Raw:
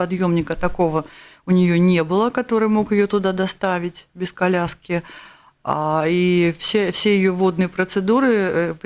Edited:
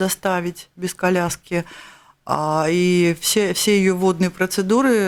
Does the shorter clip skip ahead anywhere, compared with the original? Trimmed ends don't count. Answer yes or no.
no